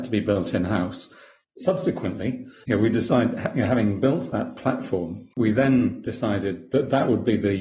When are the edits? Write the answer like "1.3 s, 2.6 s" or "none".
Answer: 1.4 s, 5.3 s